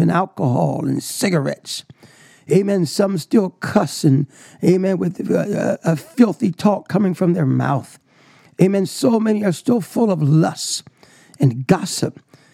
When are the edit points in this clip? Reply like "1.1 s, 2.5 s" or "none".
none